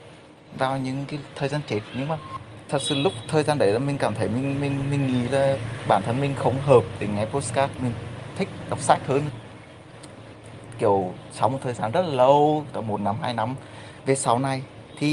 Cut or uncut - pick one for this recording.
cut